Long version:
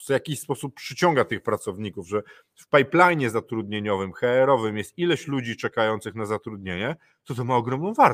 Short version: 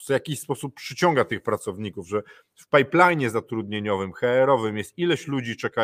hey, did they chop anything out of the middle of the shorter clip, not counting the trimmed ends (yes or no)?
no